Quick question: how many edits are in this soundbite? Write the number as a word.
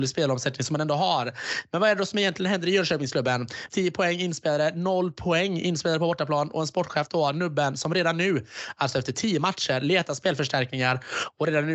one